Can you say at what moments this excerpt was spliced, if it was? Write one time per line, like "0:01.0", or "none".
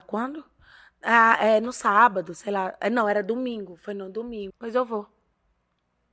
0:04.5